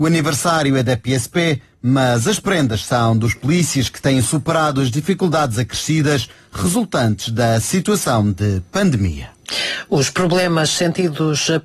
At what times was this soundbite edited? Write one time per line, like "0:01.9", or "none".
none